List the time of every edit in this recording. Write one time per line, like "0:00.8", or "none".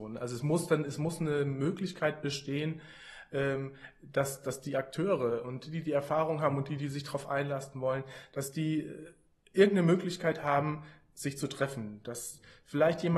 none